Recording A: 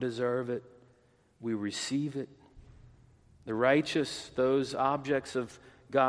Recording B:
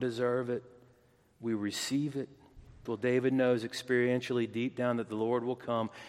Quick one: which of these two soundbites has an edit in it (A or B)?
B